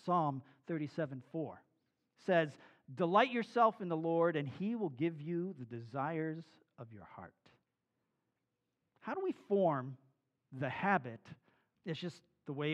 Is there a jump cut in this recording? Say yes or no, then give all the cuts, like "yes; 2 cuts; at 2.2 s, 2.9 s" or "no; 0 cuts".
yes; 1 cut; at 11.8 s